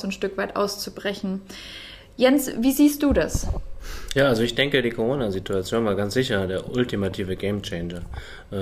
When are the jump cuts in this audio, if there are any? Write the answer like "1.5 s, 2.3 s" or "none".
none

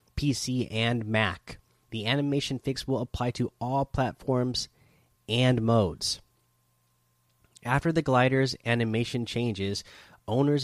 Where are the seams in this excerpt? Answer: none

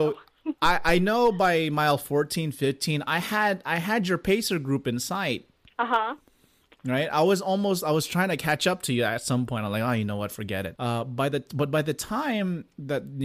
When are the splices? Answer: 10.7 s

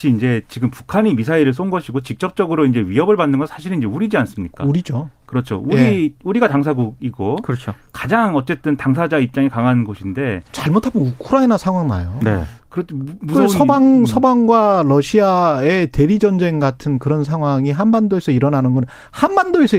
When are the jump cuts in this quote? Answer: none

